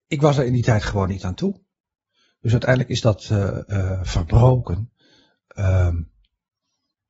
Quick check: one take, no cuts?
yes; 0 cuts

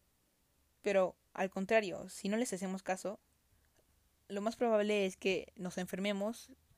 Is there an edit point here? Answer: no; 0 cuts

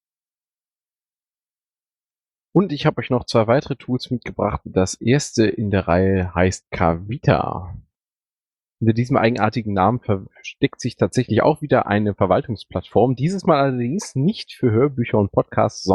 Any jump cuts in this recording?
no; 0 cuts

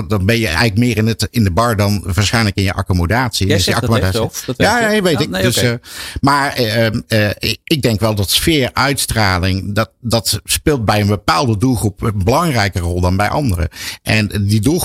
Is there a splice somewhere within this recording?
no; 0 cuts

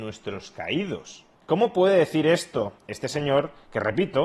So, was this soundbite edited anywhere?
yes; 1 cut; at 1.4 s

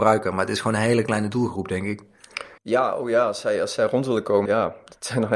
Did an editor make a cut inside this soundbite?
yes; 2 cuts; at 2.6 s, 4.5 s

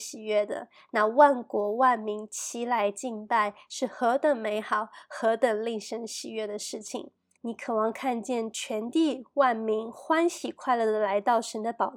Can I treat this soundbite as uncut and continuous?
no; 1 cut; at 7.3 s

